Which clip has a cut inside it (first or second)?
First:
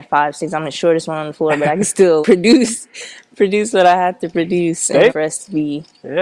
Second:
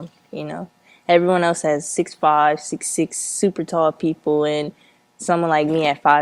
first